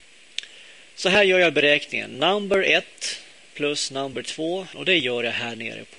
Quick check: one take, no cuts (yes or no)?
no